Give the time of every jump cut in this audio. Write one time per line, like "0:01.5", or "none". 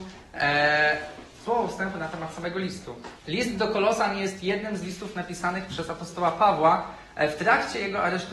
0:03.2